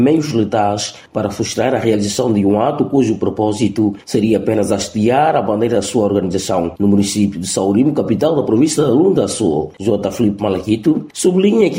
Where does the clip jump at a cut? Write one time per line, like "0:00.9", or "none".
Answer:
none